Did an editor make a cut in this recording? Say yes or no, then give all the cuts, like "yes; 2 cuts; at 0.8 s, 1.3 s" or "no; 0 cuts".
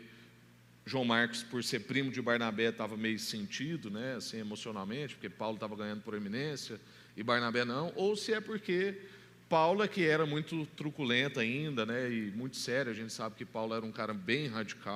no; 0 cuts